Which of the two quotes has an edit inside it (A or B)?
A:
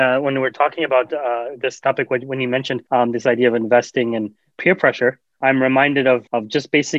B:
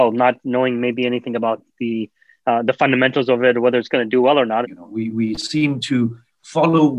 B